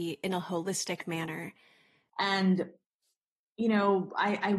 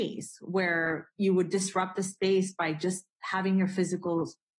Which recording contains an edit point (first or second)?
first